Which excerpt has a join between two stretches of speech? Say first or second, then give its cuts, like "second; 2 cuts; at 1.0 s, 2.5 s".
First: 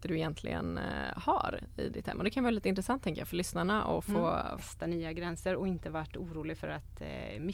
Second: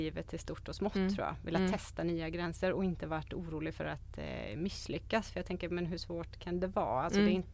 first; 1 cut; at 4.6 s